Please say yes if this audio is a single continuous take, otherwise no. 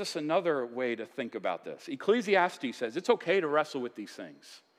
yes